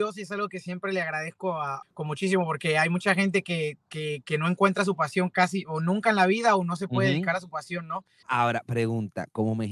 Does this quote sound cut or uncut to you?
cut